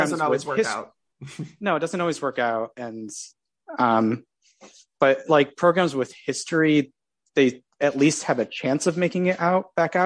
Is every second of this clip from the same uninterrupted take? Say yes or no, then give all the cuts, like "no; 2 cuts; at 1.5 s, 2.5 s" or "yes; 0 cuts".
no; 1 cut; at 5.0 s